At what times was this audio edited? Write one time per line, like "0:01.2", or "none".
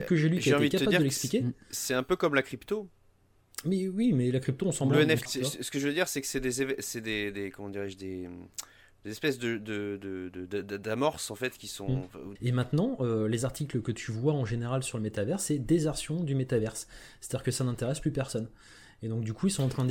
0:05.3
0:12.4